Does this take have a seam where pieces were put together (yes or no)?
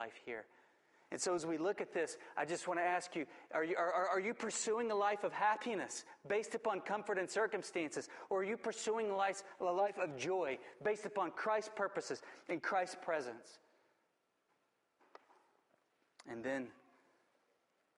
no